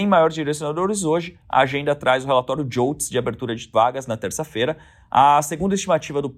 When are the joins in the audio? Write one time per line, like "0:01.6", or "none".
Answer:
none